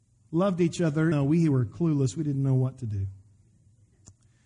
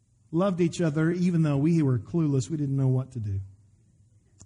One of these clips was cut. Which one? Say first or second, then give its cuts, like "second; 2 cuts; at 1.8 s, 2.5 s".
first; 1 cut; at 1.1 s